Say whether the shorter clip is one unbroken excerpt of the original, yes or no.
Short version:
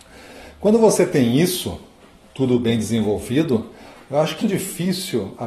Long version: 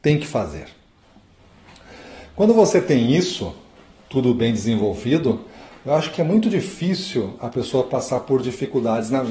no